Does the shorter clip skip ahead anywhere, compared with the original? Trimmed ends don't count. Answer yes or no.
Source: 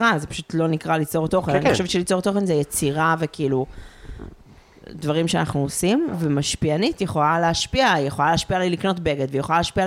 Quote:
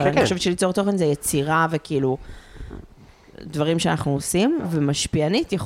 no